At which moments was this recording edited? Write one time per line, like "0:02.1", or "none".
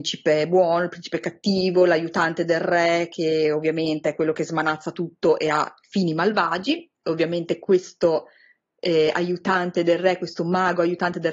none